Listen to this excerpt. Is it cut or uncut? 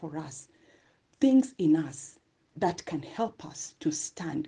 cut